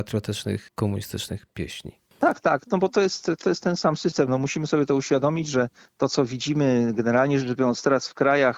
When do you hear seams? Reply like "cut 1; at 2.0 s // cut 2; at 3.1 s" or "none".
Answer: none